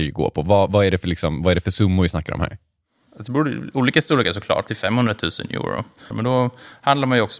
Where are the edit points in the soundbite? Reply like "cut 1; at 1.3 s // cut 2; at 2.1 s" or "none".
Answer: cut 1; at 4.7 s // cut 2; at 6.1 s